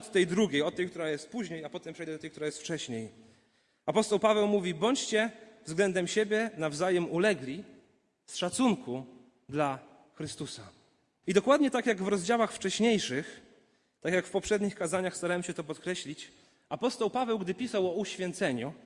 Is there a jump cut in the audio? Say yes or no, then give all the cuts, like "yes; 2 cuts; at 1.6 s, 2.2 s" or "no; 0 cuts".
yes; 1 cut; at 11.2 s